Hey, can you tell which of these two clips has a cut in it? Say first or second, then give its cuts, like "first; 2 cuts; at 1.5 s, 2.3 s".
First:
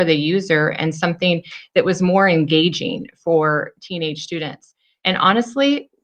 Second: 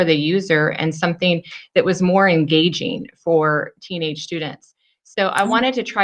first; 1 cut; at 5.0 s